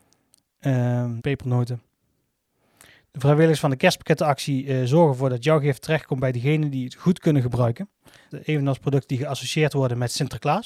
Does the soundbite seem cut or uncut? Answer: cut